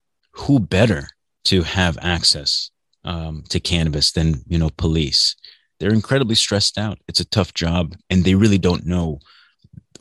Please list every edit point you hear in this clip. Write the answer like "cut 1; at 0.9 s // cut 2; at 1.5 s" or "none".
none